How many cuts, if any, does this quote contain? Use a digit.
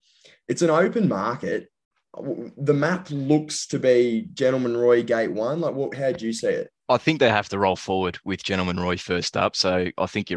0